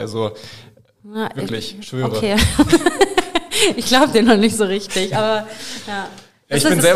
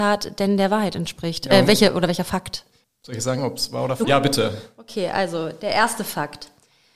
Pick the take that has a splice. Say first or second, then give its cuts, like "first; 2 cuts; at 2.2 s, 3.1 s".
second; 2 cuts; at 2.8 s, 4.0 s